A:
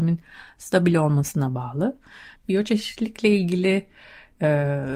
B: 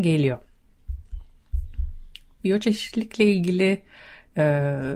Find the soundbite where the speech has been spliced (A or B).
A